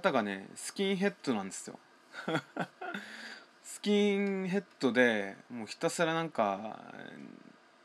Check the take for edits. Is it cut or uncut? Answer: uncut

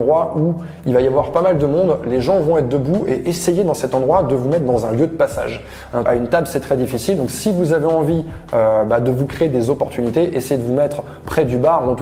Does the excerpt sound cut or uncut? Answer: cut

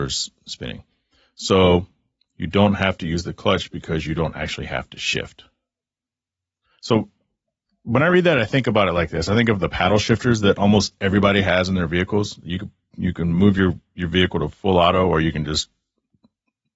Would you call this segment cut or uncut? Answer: uncut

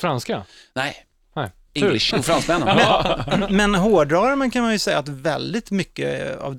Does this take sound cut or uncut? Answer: cut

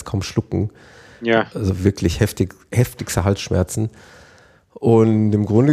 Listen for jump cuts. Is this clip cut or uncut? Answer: uncut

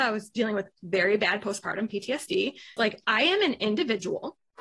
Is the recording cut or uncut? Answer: cut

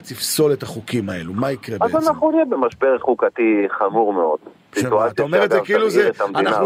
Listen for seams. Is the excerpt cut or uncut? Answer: uncut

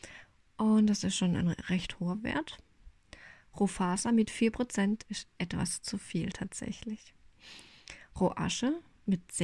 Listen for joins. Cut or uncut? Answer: cut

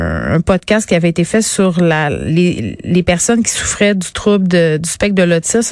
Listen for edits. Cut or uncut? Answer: uncut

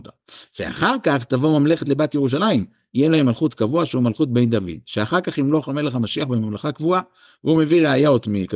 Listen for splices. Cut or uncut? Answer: uncut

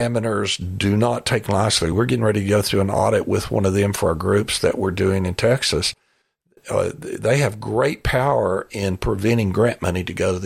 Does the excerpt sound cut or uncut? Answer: uncut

